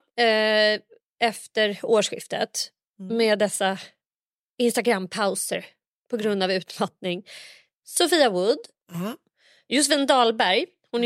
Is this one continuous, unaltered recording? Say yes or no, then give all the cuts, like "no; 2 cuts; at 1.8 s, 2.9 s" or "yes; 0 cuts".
yes; 0 cuts